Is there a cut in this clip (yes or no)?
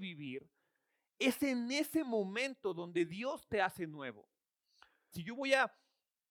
yes